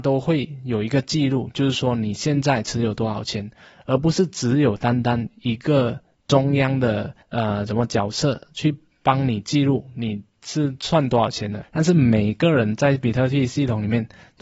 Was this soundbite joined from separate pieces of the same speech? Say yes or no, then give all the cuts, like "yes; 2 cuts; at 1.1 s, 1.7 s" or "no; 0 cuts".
yes; 2 cuts; at 7.2 s, 11.6 s